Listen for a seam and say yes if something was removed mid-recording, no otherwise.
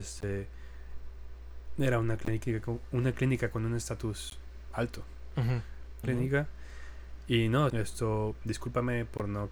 yes